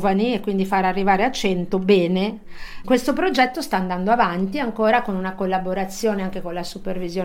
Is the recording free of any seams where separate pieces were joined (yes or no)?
no